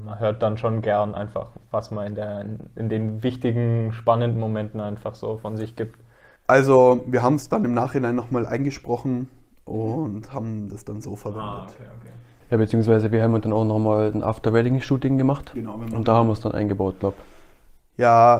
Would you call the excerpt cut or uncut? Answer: uncut